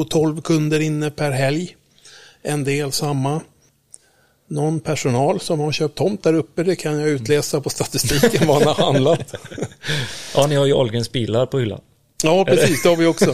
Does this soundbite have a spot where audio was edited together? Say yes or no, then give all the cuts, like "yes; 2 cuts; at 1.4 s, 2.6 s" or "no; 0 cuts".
no; 0 cuts